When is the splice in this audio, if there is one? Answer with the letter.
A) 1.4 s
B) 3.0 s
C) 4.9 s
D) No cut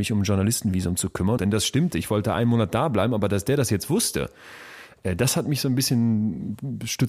A